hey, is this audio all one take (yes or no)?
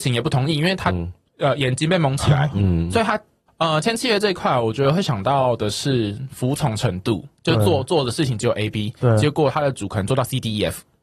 no